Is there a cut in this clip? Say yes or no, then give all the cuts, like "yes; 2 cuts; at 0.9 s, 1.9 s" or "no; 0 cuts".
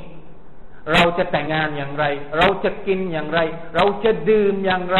yes; 1 cut; at 1.5 s